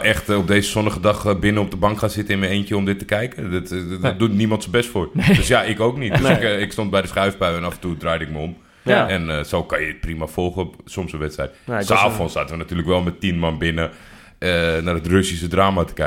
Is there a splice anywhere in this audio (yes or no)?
no